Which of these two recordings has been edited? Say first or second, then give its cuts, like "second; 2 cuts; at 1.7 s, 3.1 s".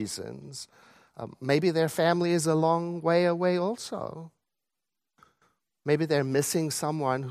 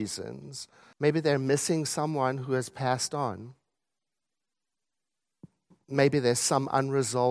second; 1 cut; at 0.9 s